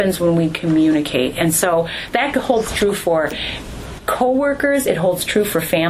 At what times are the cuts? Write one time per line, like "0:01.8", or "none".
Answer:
0:02.1